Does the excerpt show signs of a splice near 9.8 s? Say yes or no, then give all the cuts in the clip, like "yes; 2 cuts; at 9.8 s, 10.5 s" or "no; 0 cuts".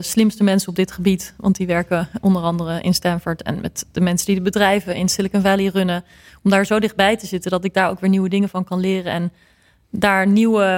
no; 0 cuts